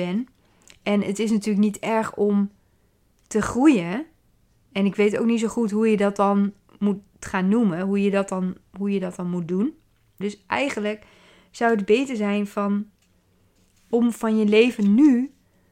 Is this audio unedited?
no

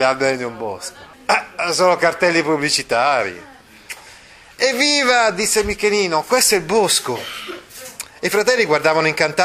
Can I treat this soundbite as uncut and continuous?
no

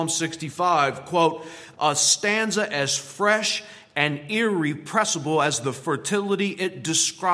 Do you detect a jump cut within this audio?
yes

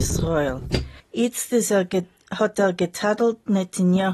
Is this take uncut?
no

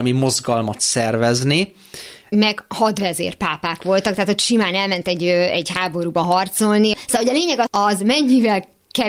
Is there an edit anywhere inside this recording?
yes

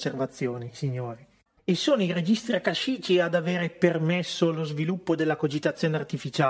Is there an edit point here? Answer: yes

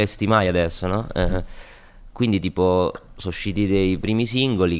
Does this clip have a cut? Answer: no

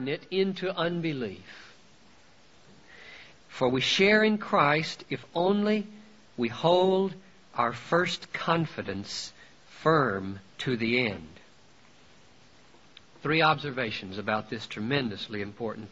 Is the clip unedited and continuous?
no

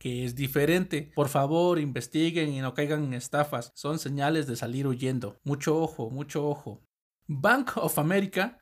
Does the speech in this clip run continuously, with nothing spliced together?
no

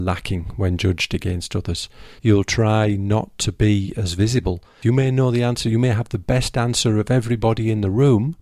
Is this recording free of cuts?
no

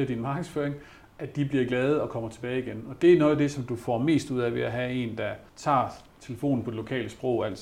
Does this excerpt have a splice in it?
yes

